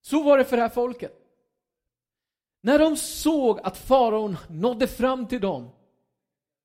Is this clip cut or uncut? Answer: uncut